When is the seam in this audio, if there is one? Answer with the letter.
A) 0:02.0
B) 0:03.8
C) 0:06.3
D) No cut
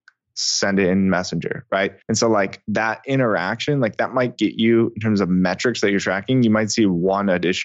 A